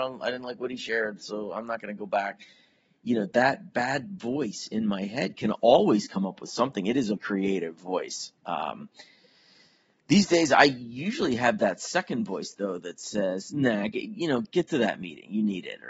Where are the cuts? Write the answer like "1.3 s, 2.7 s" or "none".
7.2 s